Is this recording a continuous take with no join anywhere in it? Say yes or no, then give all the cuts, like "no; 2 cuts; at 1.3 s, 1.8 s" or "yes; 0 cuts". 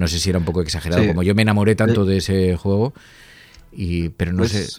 yes; 0 cuts